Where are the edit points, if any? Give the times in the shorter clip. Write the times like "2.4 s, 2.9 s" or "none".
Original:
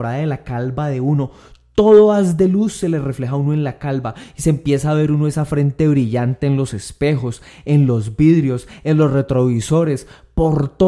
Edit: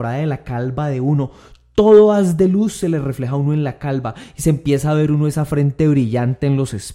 none